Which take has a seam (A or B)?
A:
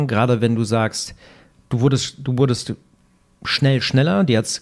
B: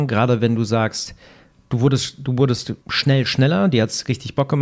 B